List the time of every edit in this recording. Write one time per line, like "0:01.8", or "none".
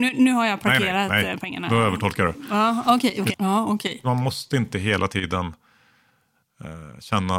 0:03.3